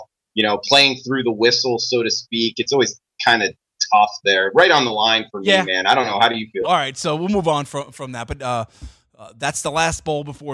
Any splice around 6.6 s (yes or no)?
yes